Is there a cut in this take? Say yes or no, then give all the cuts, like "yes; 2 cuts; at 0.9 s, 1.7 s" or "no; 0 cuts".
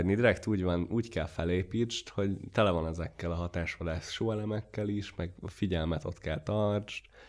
no; 0 cuts